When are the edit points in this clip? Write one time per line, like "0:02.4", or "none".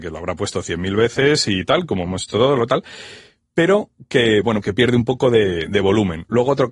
0:04.6